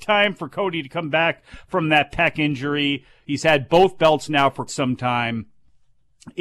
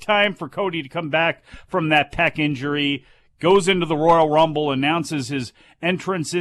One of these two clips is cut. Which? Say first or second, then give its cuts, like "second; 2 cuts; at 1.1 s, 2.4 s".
first; 2 cuts; at 3.2 s, 4.7 s